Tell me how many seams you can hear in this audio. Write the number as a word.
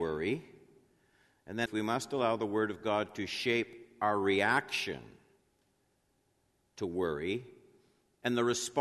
one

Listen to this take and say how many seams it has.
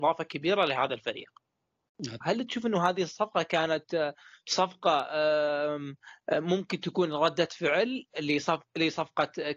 one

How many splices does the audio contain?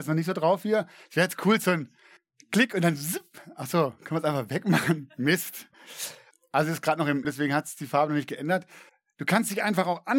one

